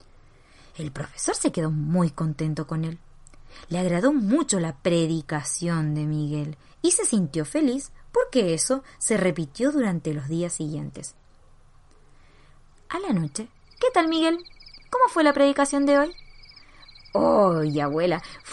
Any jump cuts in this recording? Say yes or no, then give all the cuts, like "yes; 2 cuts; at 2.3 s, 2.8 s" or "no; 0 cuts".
yes; 1 cut; at 13.8 s